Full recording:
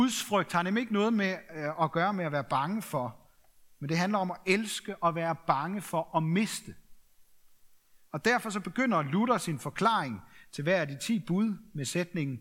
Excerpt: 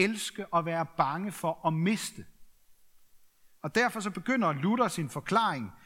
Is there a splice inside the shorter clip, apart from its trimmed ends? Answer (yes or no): no